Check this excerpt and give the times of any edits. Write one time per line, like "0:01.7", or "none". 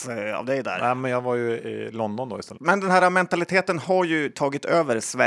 0:02.6